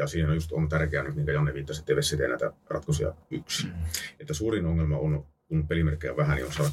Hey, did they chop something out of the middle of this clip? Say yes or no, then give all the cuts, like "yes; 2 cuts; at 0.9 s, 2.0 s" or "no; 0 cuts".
no; 0 cuts